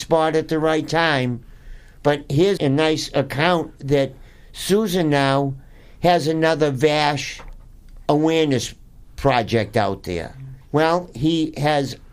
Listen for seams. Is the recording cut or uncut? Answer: cut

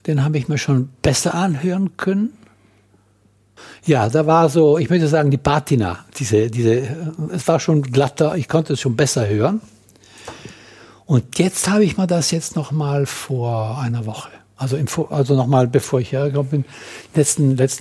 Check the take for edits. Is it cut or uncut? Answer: uncut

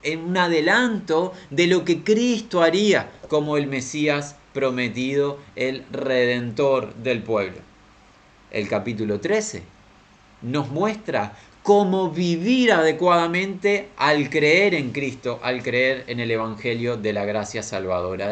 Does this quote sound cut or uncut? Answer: uncut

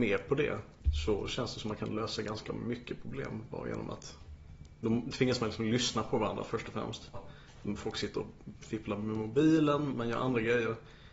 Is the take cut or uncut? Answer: cut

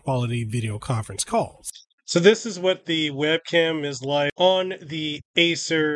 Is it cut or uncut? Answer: uncut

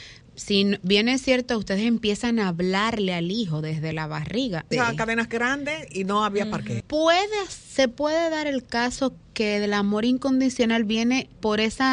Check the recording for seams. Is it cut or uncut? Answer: cut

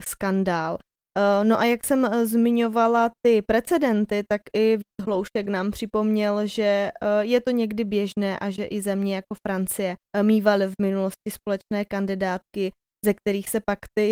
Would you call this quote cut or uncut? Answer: cut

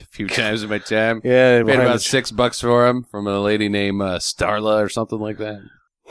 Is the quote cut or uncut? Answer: uncut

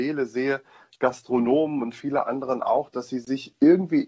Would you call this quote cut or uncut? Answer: uncut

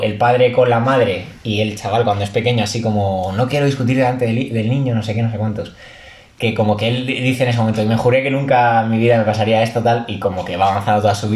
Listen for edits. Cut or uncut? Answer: uncut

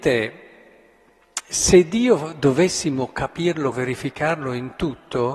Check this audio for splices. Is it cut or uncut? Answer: cut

